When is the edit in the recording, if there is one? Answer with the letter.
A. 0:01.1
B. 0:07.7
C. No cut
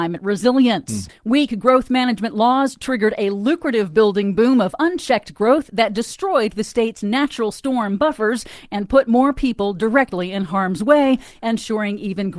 A